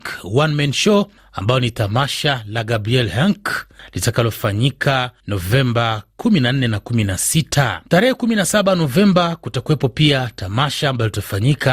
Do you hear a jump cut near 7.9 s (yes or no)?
yes